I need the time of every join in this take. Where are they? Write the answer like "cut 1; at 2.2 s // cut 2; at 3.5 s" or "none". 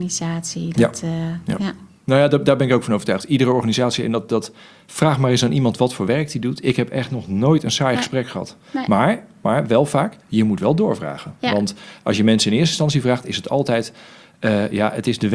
none